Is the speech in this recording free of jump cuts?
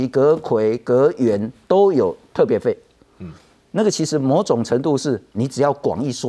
yes; 0 cuts

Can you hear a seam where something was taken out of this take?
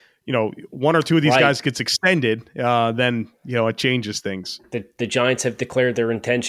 no; 0 cuts

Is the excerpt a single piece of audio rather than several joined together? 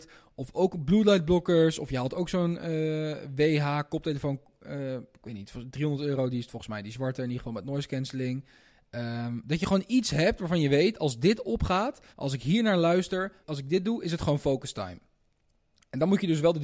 no; 2 cuts; at 12.1 s, 13.4 s

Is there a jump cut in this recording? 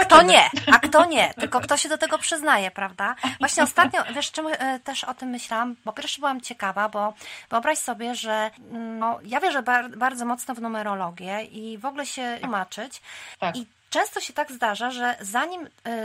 yes; 2 cuts; at 9.0 s, 12.4 s

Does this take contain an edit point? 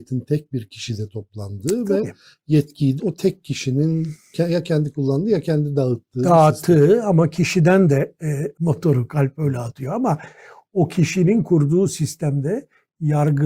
yes; 2 cuts; at 3.0 s, 8.5 s

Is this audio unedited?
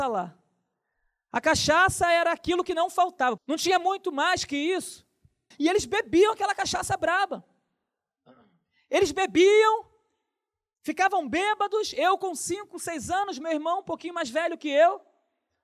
no; 2 cuts; at 3.4 s, 5.5 s

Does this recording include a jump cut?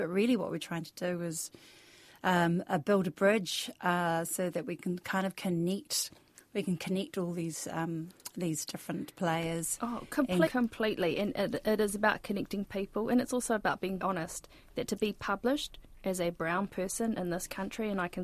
yes; 2 cuts; at 10.5 s, 14.0 s

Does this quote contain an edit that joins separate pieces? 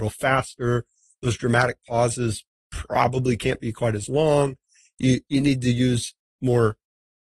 no; 0 cuts

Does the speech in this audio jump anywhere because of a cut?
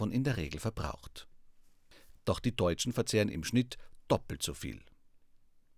yes; 1 cut; at 2.2 s

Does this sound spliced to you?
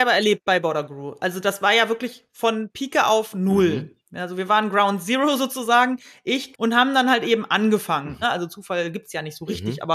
yes; 2 cuts; at 6.5 s, 8.2 s

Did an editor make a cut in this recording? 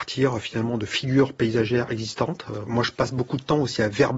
yes; 1 cut; at 2.7 s

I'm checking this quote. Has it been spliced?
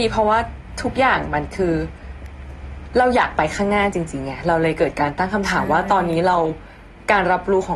no; 0 cuts

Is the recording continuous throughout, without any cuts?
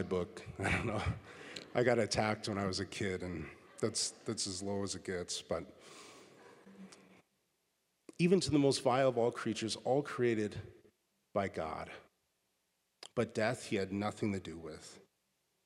yes; 0 cuts

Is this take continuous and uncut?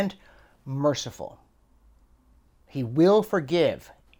yes; 0 cuts

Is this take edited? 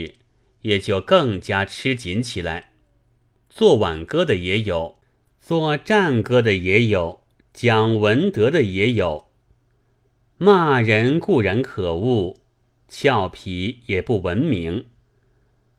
no; 0 cuts

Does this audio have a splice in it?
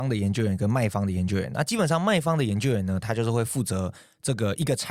no; 0 cuts

